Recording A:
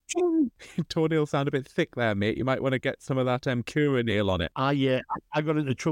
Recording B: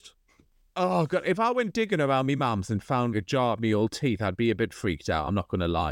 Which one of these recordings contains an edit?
B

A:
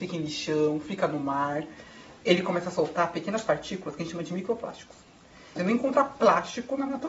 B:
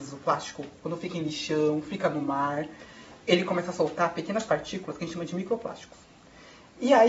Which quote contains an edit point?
A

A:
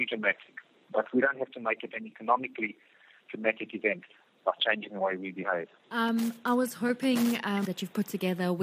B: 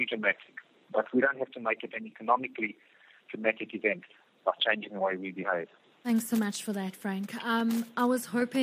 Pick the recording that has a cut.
A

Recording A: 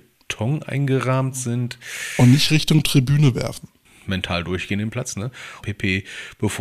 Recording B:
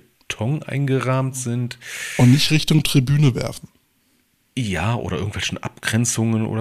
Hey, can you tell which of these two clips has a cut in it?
A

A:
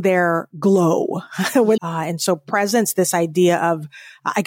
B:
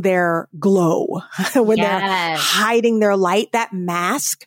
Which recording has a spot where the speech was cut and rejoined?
A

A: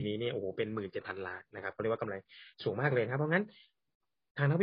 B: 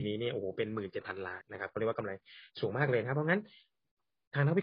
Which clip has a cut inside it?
B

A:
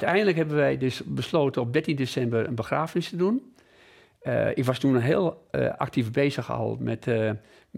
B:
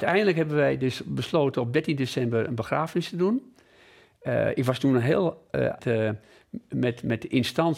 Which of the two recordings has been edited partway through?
B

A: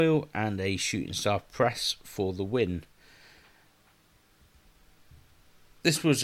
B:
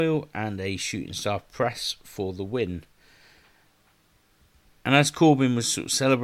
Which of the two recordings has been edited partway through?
B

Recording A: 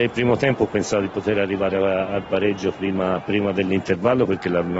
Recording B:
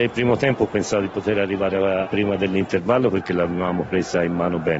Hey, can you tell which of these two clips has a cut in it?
B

